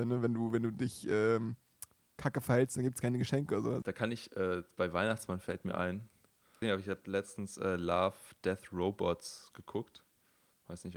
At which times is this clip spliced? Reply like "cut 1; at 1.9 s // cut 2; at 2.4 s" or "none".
cut 1; at 3.8 s // cut 2; at 6.6 s